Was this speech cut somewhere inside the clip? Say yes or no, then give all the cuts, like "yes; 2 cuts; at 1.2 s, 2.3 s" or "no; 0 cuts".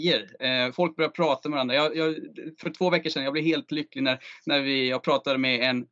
no; 0 cuts